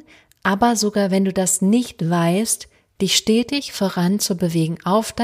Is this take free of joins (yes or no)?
no